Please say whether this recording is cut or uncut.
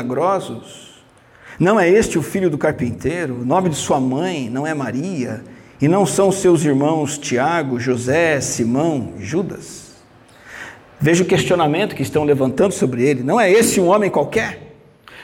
uncut